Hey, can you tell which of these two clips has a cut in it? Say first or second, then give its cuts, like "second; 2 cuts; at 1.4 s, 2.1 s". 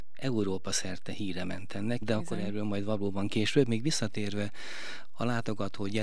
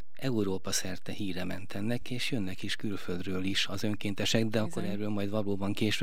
first; 1 cut; at 2.0 s